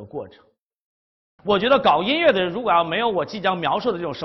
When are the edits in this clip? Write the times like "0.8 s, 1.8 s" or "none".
1.4 s